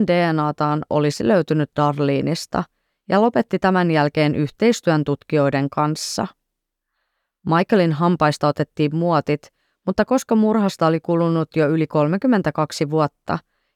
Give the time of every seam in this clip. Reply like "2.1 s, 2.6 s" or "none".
none